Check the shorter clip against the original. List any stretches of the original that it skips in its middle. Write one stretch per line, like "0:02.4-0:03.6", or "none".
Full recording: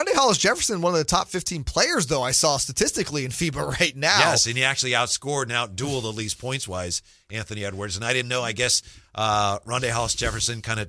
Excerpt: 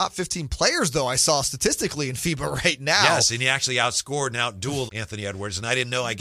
0:06.0-0:07.2